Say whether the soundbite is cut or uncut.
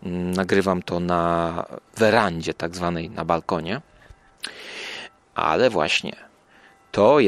cut